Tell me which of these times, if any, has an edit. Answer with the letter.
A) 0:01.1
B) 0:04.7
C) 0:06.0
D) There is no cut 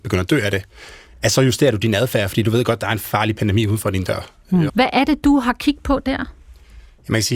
B